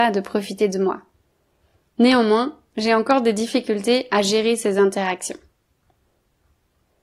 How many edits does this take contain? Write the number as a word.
zero